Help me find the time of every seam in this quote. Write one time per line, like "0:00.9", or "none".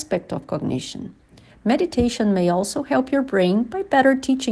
0:01.5

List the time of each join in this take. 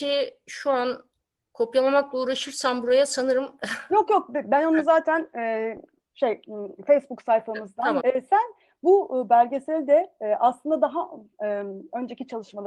0:08.0

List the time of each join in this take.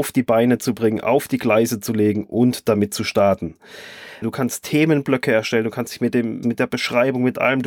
0:04.2
0:06.4

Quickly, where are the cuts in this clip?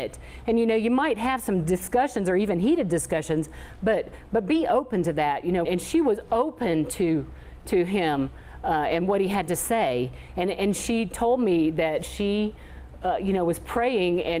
0:05.6

